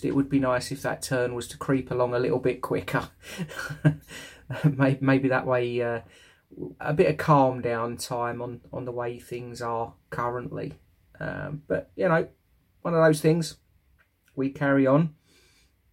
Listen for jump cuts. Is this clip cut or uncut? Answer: cut